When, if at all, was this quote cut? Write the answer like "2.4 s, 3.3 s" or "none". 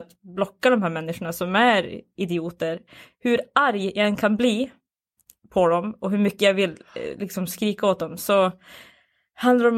none